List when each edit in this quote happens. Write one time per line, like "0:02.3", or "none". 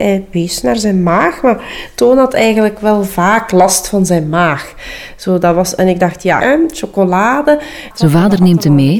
0:06.4
0:07.9